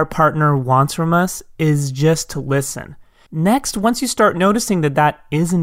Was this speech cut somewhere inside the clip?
yes; 1 cut; at 3.3 s

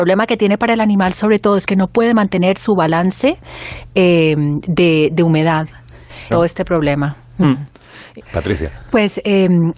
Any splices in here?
yes; 2 cuts; at 6.3 s, 8.2 s

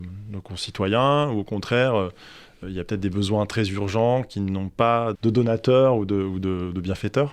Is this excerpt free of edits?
no; 2 cuts; at 2.6 s, 5.1 s

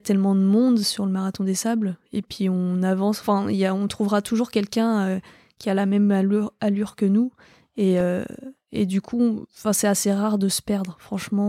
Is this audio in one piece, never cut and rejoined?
yes; 0 cuts

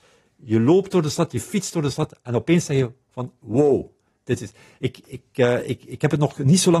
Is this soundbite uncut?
yes; 0 cuts

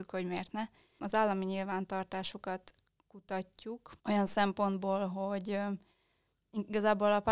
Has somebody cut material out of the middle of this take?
yes; 2 cuts; at 1.0 s, 4.0 s

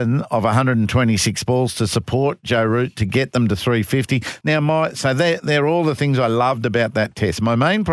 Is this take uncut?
no; 1 cut; at 4.4 s

